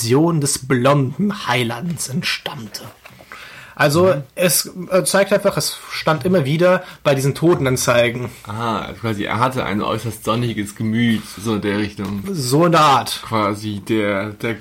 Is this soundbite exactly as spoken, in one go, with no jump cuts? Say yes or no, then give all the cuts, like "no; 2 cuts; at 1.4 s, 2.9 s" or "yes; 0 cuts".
yes; 0 cuts